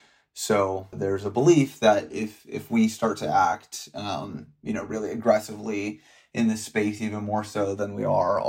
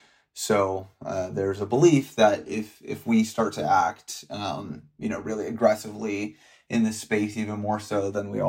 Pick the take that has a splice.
first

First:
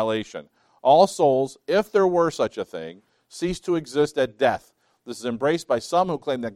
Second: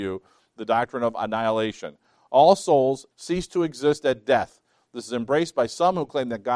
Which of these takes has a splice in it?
second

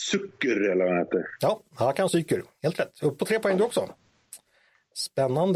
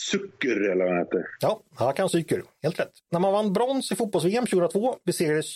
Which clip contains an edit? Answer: second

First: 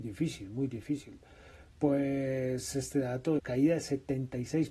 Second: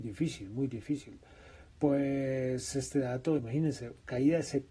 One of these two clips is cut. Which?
first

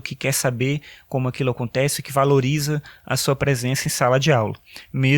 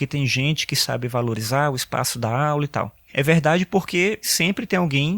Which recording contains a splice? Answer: second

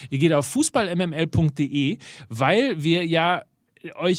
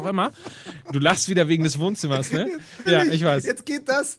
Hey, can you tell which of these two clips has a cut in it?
second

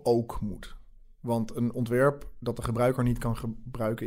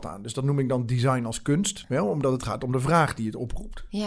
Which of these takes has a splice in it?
second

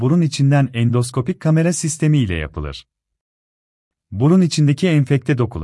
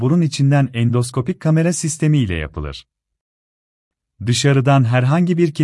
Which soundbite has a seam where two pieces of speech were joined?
first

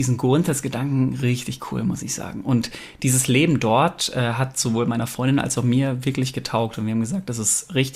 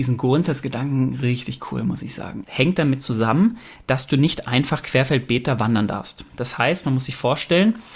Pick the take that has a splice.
second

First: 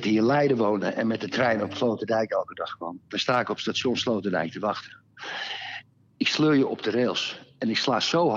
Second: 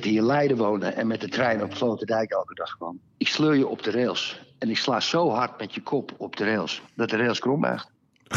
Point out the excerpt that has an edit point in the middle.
second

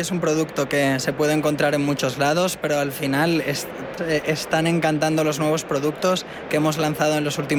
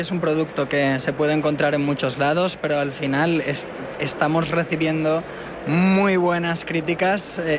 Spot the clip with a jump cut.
first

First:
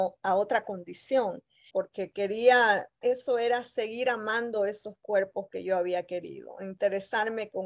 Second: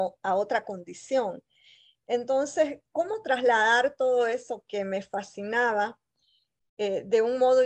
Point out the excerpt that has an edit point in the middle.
first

